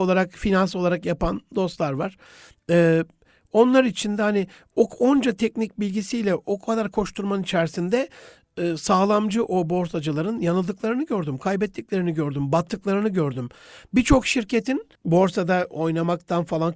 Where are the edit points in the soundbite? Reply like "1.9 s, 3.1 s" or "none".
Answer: 14.9 s